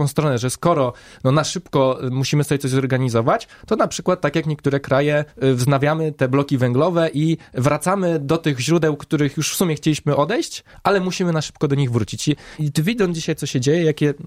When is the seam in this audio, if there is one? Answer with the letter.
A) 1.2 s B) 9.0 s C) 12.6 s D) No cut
C